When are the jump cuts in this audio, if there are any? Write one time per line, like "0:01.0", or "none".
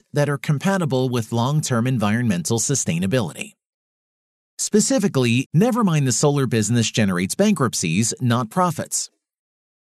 0:05.5